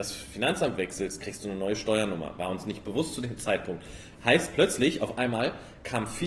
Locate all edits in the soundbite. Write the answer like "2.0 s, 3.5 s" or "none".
none